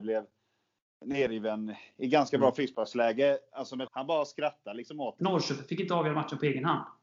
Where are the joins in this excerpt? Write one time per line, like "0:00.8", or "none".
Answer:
0:03.9
0:05.2